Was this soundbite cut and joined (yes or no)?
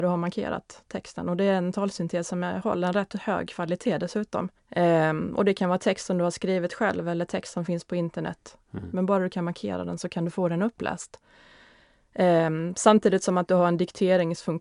yes